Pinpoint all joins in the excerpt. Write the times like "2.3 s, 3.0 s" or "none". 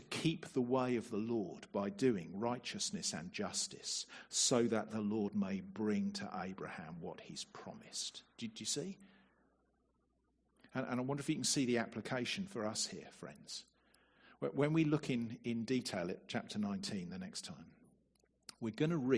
none

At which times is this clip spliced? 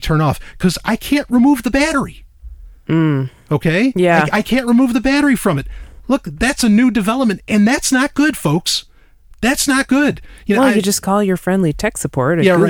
none

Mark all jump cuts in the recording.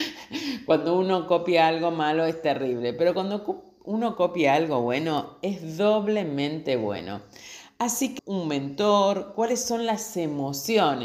8.2 s

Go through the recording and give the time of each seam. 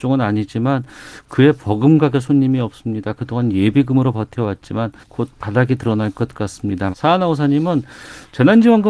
5.0 s, 6.9 s

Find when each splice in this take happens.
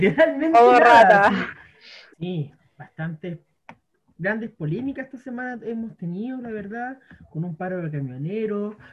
2.1 s

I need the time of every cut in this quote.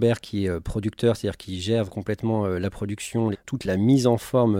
1.9 s, 3.3 s

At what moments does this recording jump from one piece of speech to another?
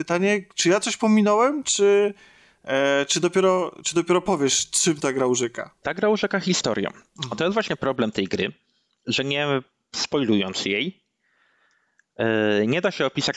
none

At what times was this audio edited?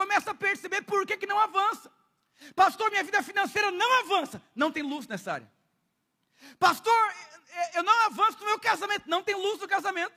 none

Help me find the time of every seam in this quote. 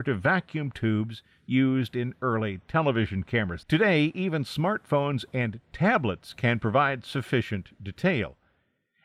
3.6 s

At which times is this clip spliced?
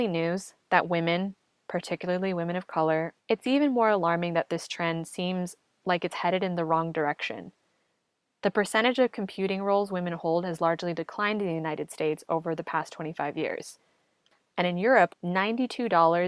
3.2 s, 15.1 s

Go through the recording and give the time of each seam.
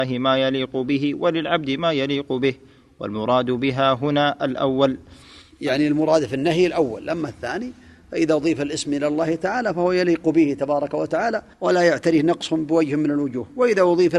11.5 s

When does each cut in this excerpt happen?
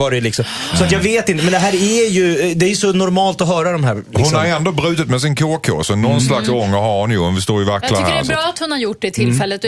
none

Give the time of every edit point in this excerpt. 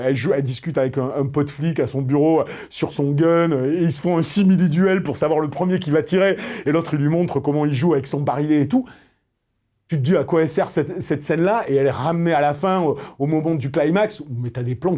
none

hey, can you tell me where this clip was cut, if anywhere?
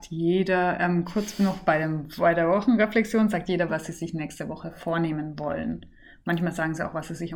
3.7 s

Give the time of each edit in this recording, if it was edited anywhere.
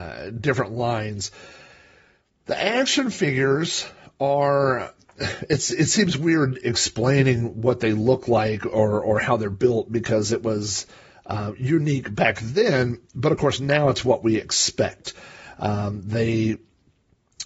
none

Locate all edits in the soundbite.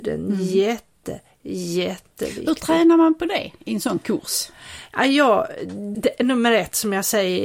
5.9 s

